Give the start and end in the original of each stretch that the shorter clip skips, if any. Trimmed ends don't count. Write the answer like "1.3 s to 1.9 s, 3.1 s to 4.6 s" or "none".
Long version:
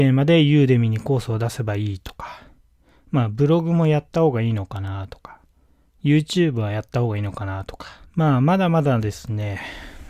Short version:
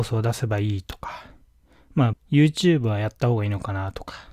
3.3 s to 5.9 s